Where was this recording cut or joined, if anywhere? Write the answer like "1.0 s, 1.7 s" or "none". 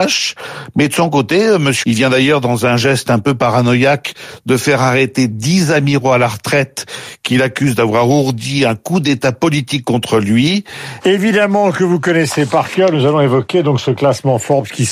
1.8 s, 11.0 s